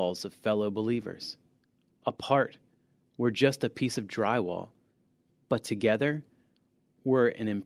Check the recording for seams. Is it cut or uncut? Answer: uncut